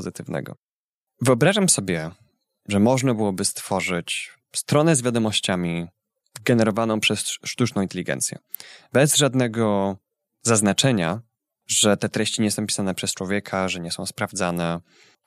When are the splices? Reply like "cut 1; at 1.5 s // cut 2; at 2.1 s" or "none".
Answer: none